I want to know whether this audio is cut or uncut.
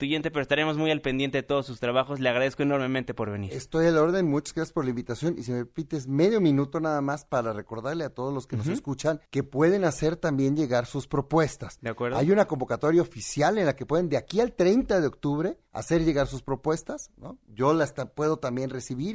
cut